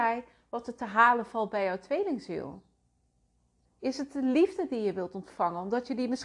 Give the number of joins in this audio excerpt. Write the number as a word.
one